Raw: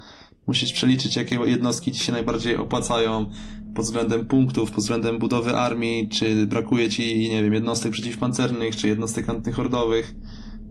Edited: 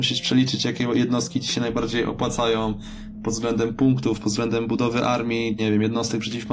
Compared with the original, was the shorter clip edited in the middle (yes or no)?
yes